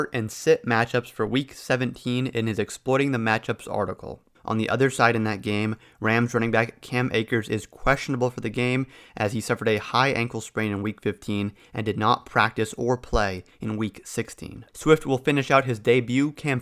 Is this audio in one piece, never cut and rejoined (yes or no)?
no